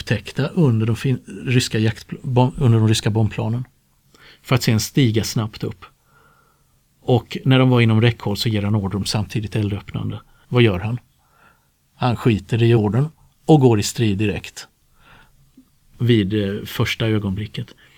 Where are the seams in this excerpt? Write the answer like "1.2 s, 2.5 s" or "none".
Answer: 10.4 s, 12.8 s